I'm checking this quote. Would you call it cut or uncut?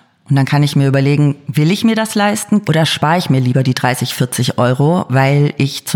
cut